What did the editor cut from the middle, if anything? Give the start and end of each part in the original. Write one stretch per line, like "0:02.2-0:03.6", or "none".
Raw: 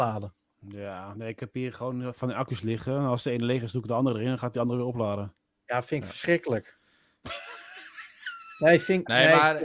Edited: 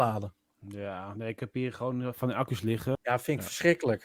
0:02.9-0:05.6